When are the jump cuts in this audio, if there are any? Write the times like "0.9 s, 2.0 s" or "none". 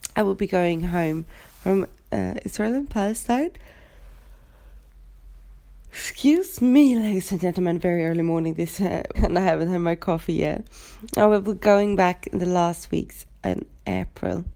9.2 s